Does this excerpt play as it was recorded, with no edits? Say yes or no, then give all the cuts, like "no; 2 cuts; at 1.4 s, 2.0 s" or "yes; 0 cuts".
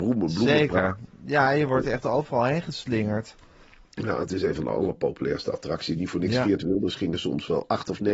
yes; 0 cuts